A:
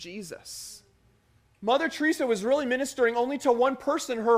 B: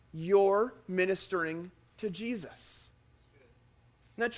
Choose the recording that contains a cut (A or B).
A